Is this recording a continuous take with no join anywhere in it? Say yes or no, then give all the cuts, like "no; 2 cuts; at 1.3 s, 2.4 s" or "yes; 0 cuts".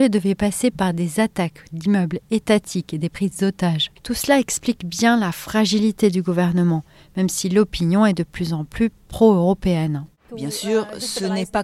no; 2 cuts; at 4.0 s, 10.3 s